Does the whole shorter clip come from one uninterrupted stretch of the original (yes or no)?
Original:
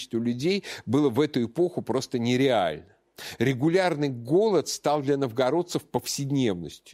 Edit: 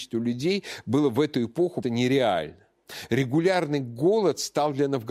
no